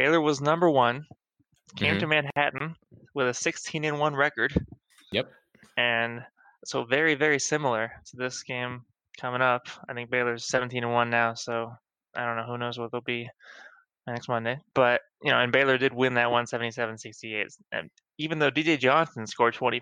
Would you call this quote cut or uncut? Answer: uncut